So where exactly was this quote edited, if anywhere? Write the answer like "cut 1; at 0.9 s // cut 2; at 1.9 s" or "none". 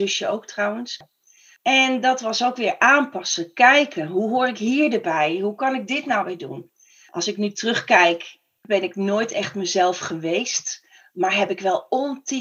none